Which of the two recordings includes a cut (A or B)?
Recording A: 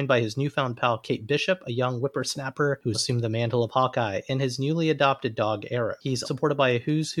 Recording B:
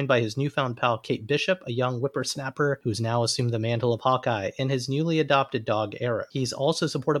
A